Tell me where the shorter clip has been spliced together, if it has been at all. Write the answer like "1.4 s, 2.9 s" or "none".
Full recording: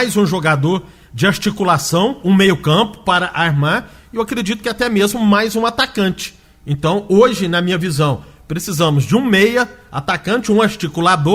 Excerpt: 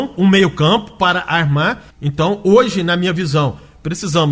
1.9 s

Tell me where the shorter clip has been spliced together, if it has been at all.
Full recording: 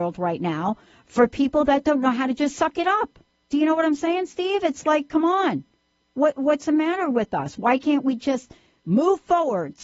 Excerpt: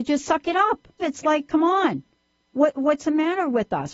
1.0 s

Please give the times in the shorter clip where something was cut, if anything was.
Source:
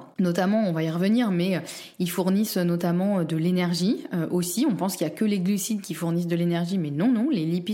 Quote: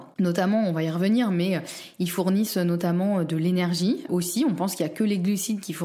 4.1 s

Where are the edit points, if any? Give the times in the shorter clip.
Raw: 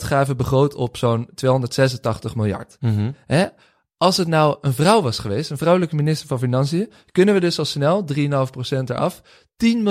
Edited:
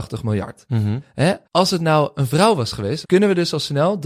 1.4 s, 3.0 s

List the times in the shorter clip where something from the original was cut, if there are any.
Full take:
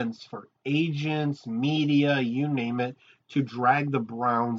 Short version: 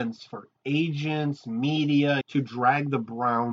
2.2 s

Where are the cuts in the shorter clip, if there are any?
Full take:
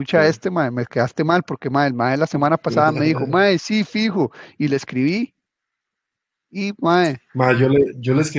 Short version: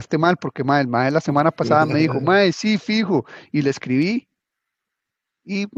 none

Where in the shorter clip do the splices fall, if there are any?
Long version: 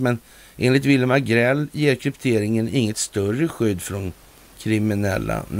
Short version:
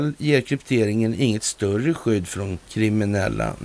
2.6 s

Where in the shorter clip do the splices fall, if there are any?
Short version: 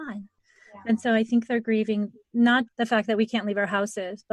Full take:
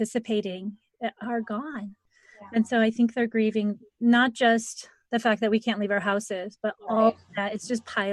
2.7 s

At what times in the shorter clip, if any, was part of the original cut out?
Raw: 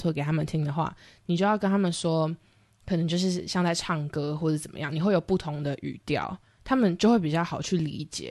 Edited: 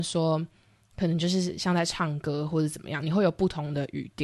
none

